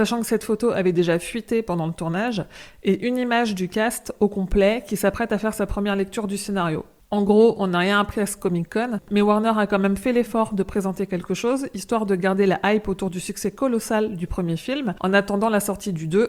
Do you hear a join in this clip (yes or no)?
no